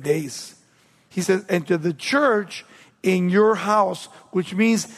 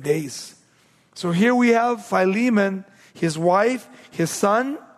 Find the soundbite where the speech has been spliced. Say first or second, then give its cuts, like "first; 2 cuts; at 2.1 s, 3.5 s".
first; 1 cut; at 1.1 s